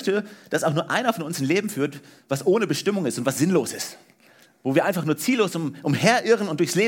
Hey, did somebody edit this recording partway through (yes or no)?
no